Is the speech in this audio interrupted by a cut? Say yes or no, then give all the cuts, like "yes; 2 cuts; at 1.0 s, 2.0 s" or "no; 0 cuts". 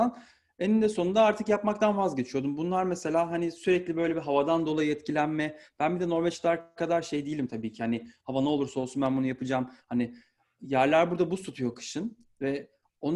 no; 0 cuts